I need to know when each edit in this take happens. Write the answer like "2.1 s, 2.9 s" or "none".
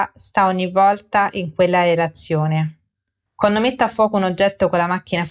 3.3 s